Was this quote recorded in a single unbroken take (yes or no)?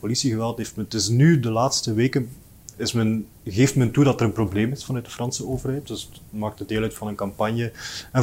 no